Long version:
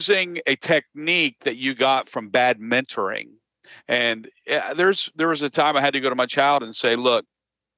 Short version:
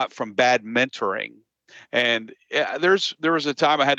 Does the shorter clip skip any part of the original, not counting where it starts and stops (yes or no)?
no